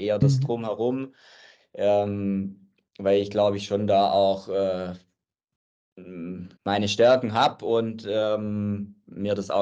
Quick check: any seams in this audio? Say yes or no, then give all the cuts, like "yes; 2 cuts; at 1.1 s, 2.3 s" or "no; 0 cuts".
yes; 1 cut; at 6.6 s